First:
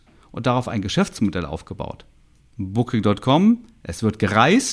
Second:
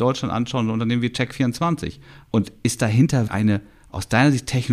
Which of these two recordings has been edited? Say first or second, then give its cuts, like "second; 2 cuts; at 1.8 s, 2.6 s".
second; 2 cuts; at 2.2 s, 3.3 s